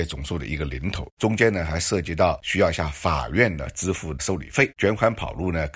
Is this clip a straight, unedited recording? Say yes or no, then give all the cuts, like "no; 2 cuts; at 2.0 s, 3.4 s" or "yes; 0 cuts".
no; 2 cuts; at 1.1 s, 4.7 s